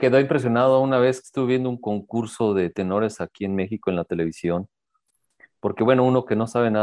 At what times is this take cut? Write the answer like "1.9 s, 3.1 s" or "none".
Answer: none